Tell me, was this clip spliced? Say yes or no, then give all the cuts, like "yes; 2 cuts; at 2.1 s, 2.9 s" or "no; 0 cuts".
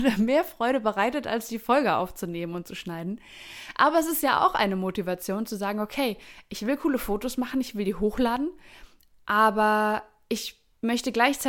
no; 0 cuts